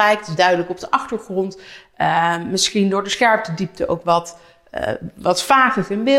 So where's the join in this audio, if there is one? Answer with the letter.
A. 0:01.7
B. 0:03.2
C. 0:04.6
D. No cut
D